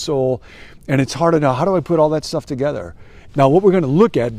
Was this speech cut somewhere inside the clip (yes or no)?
yes